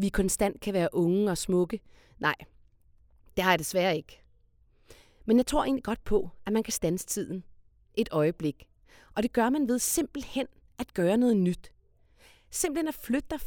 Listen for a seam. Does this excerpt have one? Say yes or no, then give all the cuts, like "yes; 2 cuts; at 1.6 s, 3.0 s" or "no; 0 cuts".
no; 0 cuts